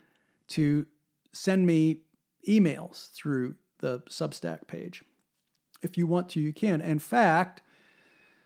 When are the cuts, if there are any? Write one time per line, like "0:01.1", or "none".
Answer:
none